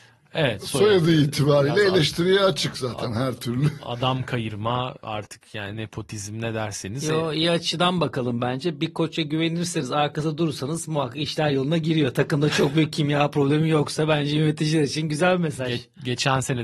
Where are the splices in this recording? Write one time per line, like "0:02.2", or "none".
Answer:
none